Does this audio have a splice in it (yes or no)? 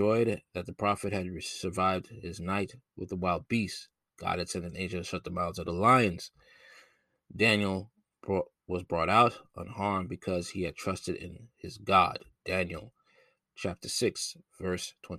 no